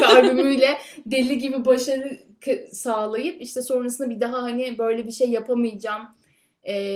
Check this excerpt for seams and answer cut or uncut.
uncut